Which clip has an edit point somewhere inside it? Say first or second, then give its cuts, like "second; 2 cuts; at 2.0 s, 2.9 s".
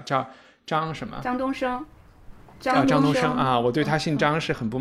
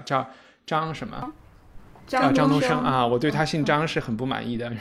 second; 1 cut; at 1.2 s